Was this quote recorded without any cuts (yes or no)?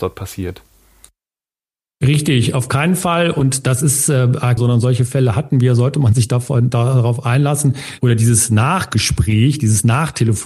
no